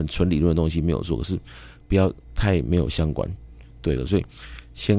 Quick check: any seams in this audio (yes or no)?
yes